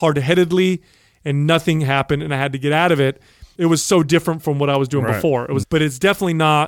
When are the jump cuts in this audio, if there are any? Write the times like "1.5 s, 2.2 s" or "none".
3.6 s, 5.6 s